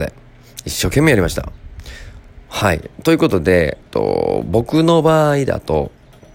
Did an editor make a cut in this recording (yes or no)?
yes